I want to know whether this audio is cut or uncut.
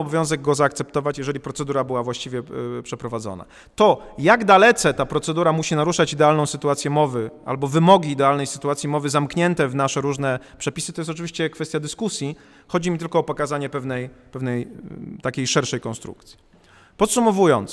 uncut